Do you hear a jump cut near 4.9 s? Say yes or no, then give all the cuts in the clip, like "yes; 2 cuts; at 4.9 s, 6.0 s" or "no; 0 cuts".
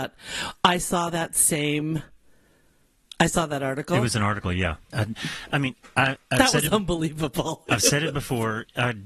yes; 1 cut; at 4.9 s